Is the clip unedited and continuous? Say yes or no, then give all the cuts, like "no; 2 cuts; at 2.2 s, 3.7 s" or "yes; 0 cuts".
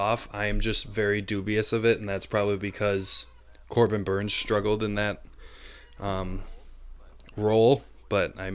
yes; 0 cuts